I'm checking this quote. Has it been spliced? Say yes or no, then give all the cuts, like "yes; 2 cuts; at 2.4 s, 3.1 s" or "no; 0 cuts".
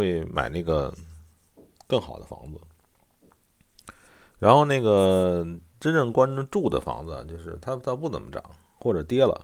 no; 0 cuts